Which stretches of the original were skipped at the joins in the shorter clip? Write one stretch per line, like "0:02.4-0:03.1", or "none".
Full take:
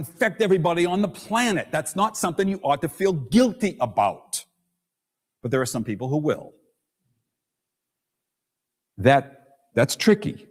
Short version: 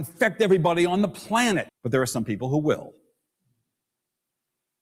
0:01.7-0:05.3